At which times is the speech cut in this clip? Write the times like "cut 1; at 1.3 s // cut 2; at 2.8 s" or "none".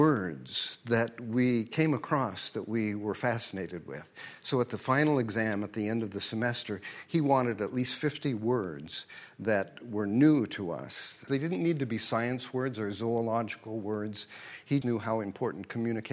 cut 1; at 11.3 s // cut 2; at 14.8 s